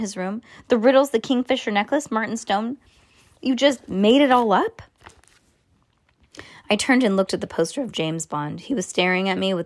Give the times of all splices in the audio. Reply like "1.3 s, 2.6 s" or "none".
none